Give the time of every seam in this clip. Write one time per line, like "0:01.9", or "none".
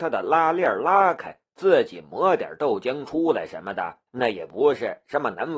0:01.5
0:04.1